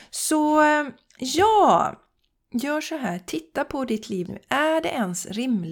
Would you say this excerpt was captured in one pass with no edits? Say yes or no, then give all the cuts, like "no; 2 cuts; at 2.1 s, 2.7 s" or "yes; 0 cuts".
no; 1 cut; at 4.3 s